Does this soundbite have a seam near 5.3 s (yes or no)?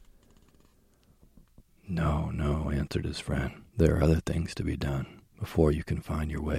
yes